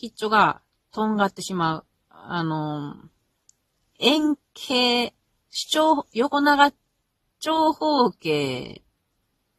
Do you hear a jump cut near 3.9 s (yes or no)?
no